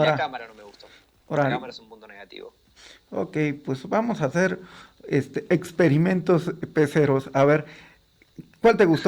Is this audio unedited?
yes; 0 cuts

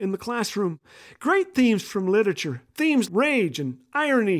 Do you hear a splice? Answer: yes; 1 cut; at 3.1 s

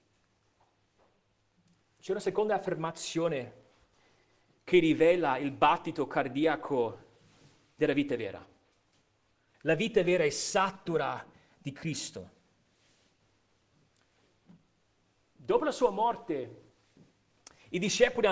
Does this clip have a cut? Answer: yes; 1 cut; at 9.5 s

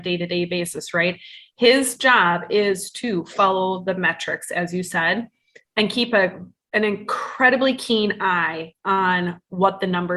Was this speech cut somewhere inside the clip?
no; 0 cuts

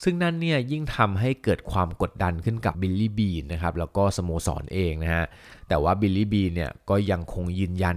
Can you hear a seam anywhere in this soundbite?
yes; 1 cut; at 2.7 s

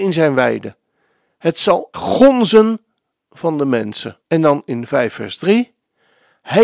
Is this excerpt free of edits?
no; 2 cuts; at 1.9 s, 4.2 s

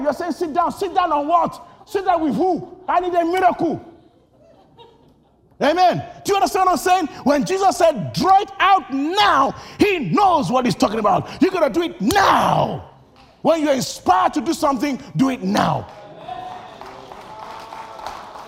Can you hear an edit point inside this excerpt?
no; 0 cuts

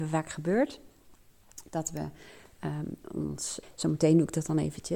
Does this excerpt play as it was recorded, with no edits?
no; 1 cut; at 3.6 s

